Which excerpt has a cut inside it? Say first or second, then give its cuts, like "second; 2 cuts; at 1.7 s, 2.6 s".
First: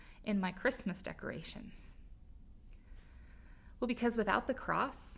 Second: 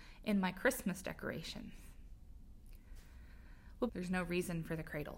second; 1 cut; at 3.9 s